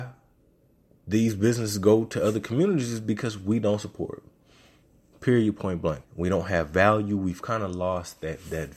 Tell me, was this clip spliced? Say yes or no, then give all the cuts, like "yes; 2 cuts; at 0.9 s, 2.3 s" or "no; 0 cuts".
yes; 1 cut; at 6.0 s